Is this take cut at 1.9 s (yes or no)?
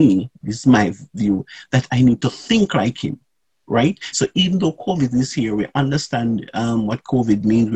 yes